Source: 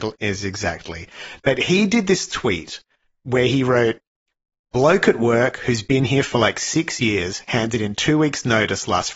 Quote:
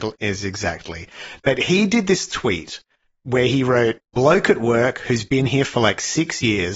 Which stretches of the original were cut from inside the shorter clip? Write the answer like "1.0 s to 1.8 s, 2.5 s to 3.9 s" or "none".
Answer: 4.1 s to 4.6 s